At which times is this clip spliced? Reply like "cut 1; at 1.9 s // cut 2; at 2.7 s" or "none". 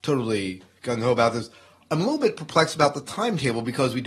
none